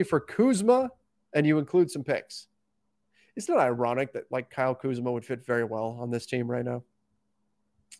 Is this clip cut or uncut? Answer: uncut